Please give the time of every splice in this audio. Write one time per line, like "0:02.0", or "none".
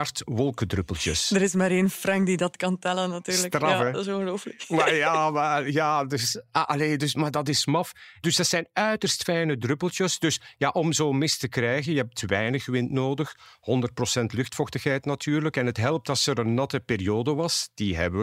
none